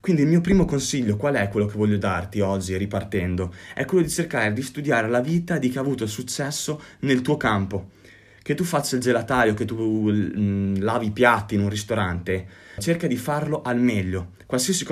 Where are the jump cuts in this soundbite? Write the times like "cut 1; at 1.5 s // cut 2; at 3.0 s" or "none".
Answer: cut 1; at 12.8 s